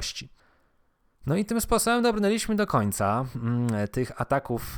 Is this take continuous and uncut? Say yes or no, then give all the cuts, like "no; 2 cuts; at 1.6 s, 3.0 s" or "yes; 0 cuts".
yes; 0 cuts